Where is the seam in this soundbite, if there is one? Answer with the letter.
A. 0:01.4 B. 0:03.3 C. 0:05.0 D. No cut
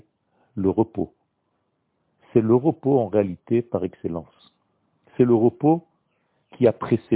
D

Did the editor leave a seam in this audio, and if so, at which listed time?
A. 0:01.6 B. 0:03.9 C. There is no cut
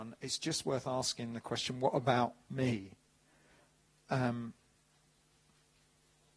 B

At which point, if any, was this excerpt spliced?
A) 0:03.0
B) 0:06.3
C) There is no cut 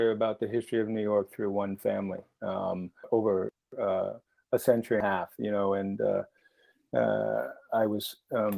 A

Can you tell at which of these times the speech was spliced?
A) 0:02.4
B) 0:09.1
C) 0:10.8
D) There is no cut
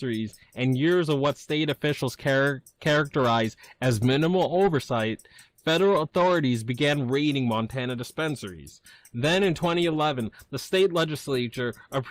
D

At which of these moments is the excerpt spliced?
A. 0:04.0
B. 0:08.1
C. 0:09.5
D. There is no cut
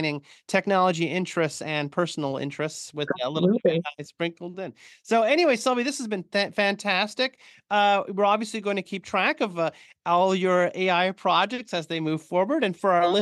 D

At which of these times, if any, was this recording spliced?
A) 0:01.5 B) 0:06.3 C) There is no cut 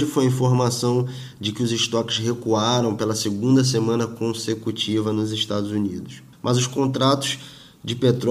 B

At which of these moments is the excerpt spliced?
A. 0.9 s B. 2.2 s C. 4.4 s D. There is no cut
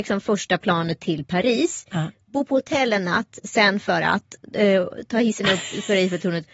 D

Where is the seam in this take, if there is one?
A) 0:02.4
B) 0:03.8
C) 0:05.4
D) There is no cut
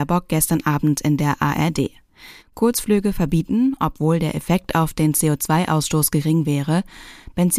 A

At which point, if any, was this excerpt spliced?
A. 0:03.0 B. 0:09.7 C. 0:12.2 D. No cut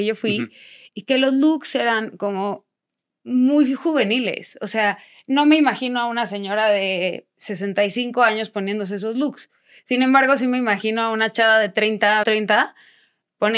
C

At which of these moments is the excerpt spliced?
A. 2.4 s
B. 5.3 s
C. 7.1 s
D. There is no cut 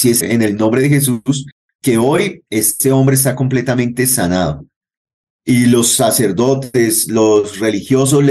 D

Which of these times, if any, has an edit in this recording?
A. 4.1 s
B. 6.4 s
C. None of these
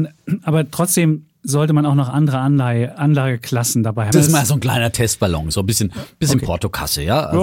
A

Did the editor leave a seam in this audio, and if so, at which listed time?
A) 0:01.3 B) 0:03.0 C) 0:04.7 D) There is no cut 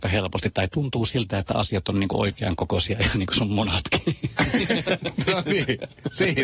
D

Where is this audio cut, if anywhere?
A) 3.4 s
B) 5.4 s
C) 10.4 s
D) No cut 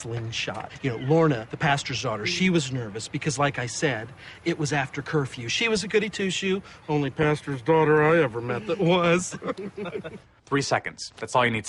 C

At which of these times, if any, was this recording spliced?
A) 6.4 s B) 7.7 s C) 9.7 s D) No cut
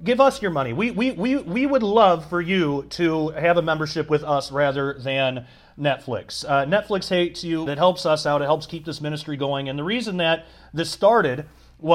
B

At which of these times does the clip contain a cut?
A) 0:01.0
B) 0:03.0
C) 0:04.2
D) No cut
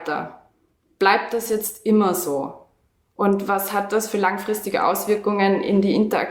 D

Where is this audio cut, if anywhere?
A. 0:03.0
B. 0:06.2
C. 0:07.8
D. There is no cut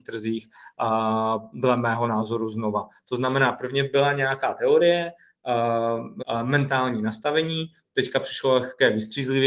B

